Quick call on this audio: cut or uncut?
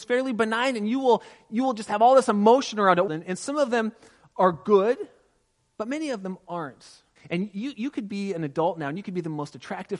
cut